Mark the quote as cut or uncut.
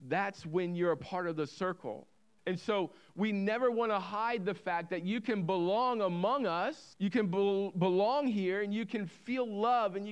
cut